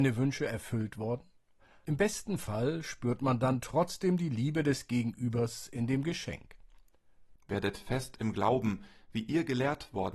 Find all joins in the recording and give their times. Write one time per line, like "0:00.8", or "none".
0:01.9
0:07.4